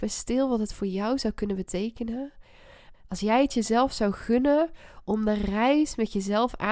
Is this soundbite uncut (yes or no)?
no